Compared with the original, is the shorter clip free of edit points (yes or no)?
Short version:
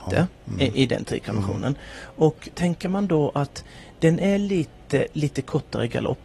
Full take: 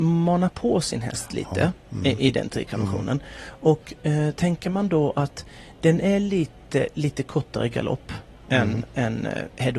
no